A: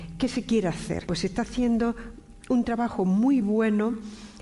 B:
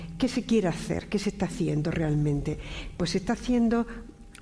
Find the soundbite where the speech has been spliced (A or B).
A